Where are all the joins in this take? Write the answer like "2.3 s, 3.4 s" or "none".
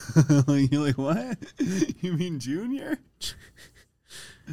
none